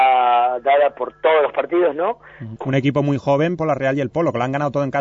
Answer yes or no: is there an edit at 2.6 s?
yes